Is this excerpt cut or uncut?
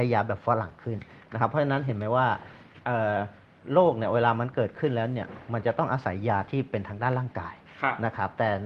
uncut